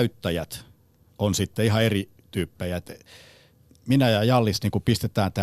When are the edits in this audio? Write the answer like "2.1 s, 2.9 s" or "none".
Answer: none